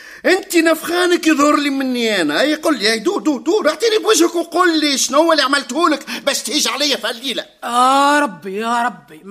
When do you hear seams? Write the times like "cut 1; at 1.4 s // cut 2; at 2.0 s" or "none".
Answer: none

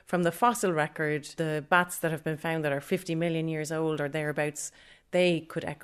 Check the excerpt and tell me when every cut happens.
none

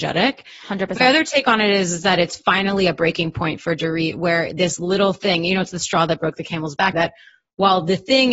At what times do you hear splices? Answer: cut 1; at 6.9 s

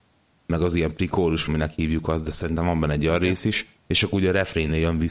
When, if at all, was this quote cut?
cut 1; at 1.5 s // cut 2; at 3.8 s

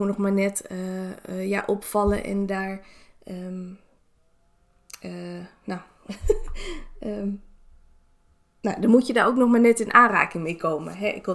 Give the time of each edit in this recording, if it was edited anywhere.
none

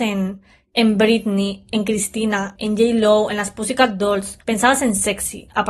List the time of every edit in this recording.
cut 1; at 2.5 s // cut 2; at 4.4 s

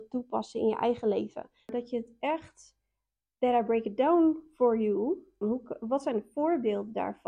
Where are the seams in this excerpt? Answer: cut 1; at 5.4 s

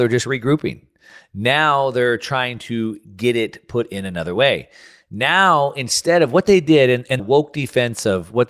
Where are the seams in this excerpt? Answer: cut 1; at 7.2 s

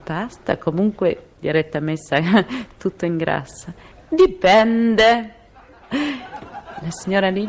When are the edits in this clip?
cut 1; at 1.3 s // cut 2; at 3.9 s // cut 3; at 5.9 s

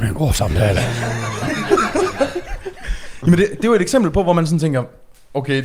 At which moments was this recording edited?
none

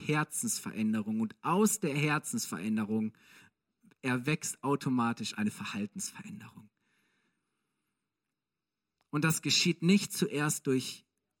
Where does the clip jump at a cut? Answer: none

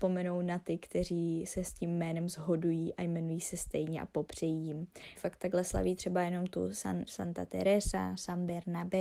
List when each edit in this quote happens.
cut 1; at 5.2 s // cut 2; at 7.1 s

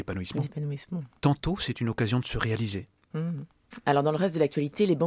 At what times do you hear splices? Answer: cut 1; at 1.2 s // cut 2; at 3.1 s

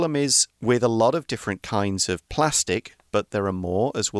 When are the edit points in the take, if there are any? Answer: cut 1; at 3.1 s

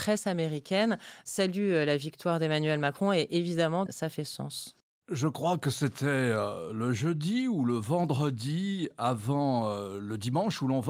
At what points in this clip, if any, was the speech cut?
cut 1; at 3.9 s

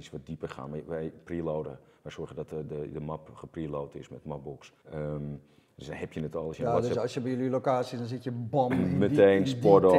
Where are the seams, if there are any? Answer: cut 1; at 4.8 s

